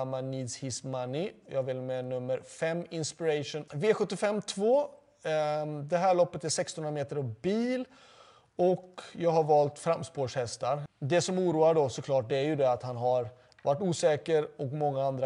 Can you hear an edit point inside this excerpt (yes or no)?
yes